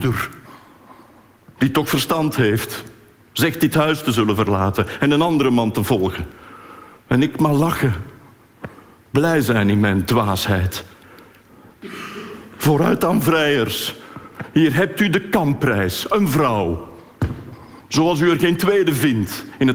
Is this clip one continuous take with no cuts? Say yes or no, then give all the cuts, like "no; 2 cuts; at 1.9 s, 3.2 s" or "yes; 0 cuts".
yes; 0 cuts